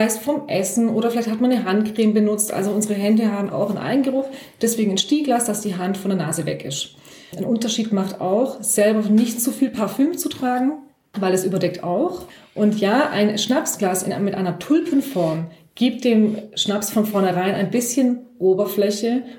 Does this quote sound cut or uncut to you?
cut